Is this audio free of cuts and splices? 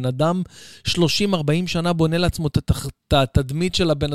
yes; 0 cuts

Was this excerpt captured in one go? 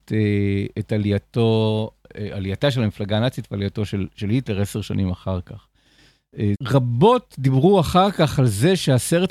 no; 1 cut; at 6.5 s

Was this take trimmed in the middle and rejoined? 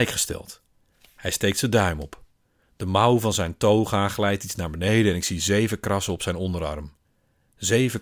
no; 0 cuts

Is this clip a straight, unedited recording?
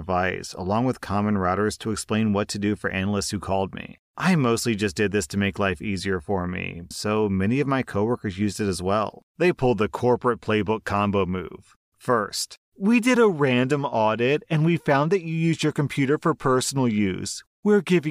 no; 2 cuts; at 6.9 s, 9.3 s

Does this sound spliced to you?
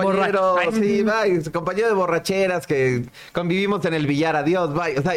no; 0 cuts

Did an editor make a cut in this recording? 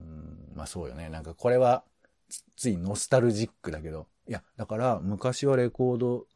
no; 0 cuts

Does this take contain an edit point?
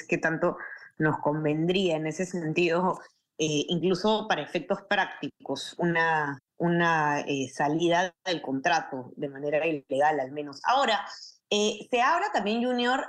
no; 0 cuts

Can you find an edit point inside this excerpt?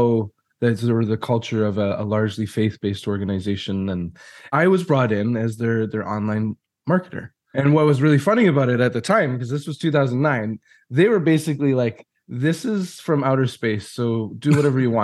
no; 0 cuts

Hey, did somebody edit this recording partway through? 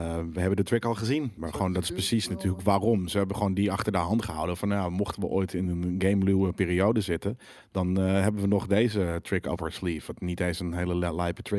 yes; 1 cut; at 1.4 s

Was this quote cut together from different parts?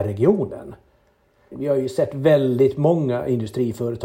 yes; 1 cut; at 1.5 s

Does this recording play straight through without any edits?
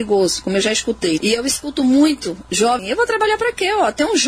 no; 2 cuts; at 1.2 s, 2.8 s

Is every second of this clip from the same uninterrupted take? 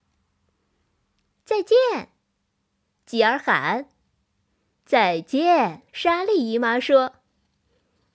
no; 3 cuts; at 1.3 s, 4.7 s, 5.9 s

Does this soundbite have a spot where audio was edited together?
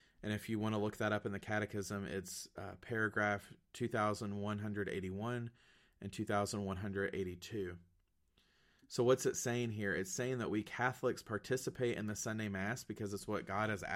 no; 0 cuts

